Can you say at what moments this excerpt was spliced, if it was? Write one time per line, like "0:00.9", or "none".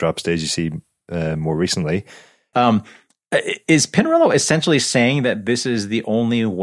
0:02.5